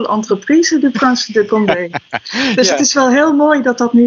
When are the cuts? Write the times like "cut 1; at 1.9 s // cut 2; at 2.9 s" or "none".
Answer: none